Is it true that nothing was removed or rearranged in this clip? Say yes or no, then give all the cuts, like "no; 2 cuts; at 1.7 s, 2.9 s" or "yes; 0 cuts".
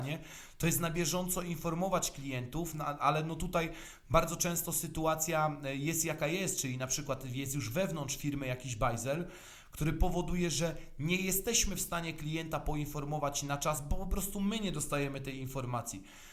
yes; 0 cuts